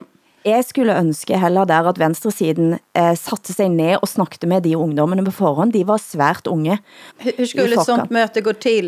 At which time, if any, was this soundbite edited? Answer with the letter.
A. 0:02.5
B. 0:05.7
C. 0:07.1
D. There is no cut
C